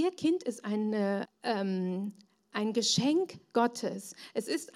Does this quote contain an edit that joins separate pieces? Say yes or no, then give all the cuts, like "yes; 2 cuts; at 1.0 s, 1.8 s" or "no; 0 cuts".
yes; 1 cut; at 1.2 s